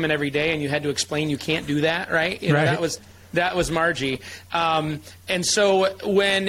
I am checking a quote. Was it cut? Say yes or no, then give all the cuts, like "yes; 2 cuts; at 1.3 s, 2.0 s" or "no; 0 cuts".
no; 0 cuts